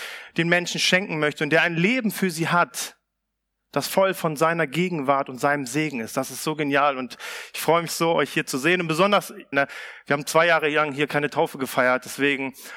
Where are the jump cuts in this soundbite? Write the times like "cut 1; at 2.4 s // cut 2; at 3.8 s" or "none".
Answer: cut 1; at 7.9 s // cut 2; at 9.5 s